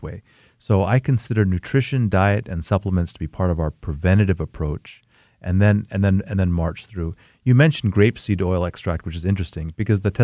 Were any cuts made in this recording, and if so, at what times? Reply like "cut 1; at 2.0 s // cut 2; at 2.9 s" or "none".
none